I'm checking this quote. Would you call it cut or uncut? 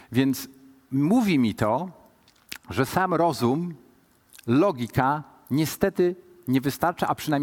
uncut